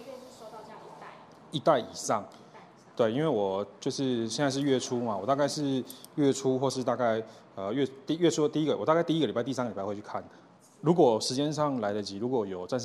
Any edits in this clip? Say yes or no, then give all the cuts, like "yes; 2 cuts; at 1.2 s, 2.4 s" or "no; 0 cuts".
no; 0 cuts